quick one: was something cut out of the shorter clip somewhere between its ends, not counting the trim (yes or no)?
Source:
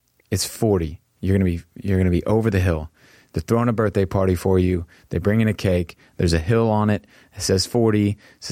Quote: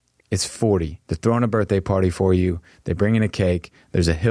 yes